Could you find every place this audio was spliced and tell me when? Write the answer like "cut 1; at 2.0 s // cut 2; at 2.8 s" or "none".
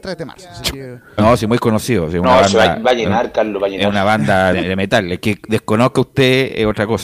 cut 1; at 1.2 s // cut 2; at 4.5 s